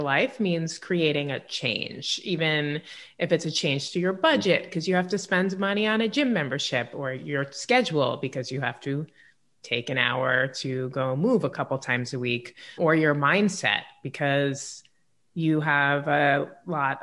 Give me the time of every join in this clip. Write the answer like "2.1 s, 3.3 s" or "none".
12.8 s